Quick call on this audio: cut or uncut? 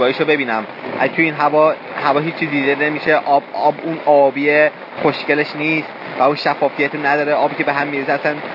uncut